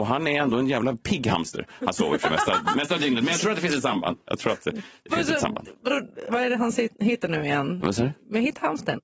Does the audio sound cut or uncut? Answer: cut